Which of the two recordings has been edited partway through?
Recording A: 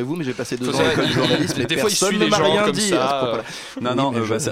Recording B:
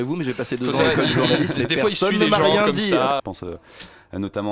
B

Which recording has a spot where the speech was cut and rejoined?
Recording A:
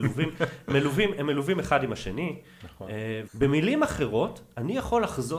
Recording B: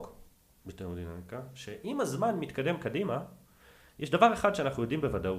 A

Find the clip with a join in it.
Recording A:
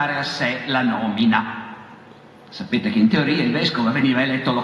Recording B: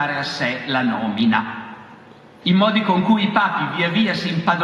B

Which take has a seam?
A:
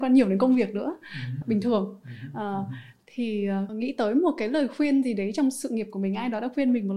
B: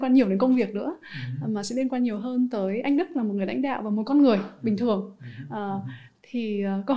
A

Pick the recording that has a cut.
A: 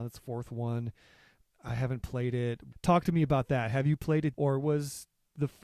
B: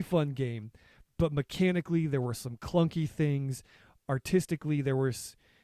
A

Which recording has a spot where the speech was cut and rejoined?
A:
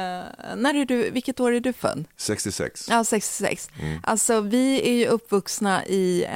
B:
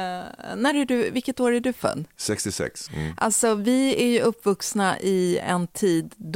B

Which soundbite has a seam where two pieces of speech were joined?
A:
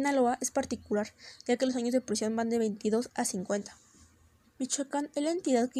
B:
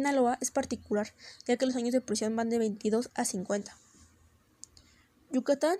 A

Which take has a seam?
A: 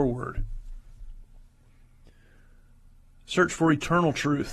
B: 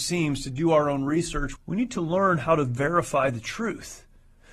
B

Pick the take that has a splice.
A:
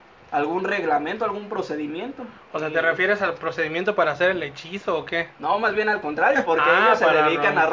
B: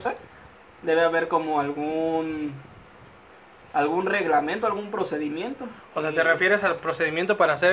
A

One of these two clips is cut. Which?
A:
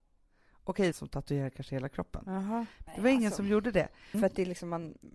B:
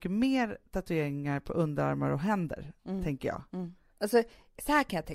A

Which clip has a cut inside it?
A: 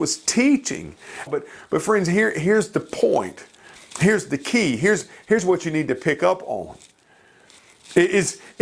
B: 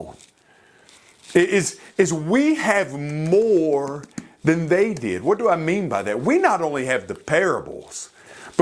A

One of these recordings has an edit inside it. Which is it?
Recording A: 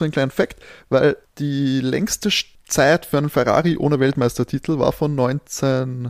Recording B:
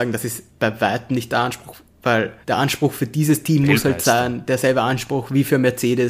B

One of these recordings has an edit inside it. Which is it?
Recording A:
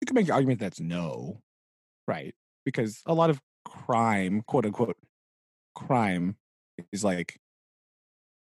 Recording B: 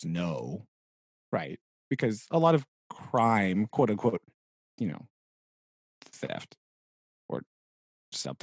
B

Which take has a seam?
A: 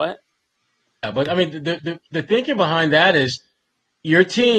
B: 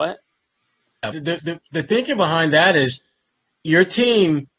B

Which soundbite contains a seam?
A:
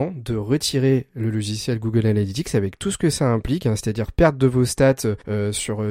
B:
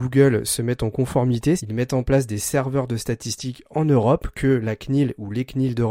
B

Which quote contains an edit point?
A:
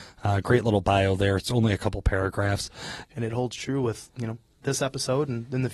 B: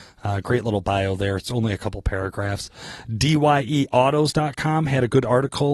A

